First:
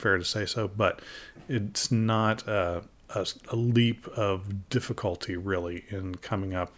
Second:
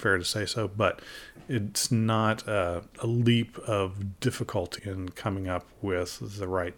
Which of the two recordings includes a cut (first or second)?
second